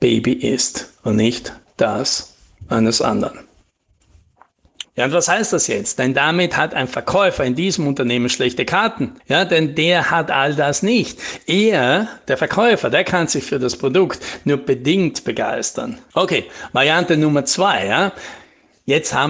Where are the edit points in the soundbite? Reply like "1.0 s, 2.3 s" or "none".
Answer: 4.8 s, 9.2 s, 16.1 s